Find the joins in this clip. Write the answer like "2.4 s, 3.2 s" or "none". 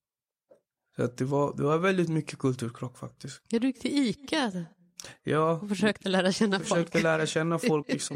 none